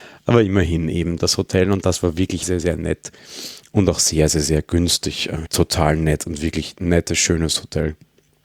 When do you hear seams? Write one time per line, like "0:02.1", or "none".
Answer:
0:02.4
0:05.4